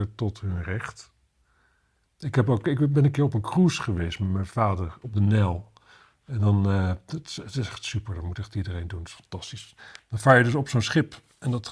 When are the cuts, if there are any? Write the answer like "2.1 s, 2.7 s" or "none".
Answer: none